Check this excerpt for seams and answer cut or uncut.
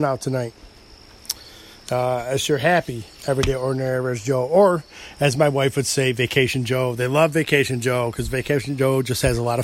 uncut